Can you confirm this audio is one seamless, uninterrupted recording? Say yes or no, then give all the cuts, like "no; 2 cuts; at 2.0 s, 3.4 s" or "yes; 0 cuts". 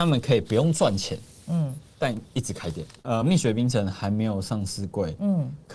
yes; 0 cuts